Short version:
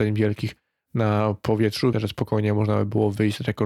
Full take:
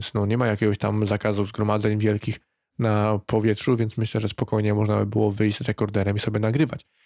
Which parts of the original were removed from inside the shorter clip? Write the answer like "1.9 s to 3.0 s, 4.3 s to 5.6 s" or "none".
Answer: 3.8 s to 4.1 s